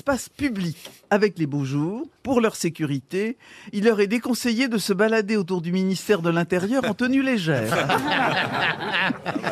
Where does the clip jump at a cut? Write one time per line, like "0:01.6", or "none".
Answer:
0:02.2